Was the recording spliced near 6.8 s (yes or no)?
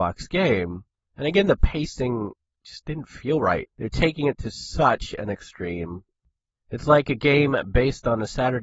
no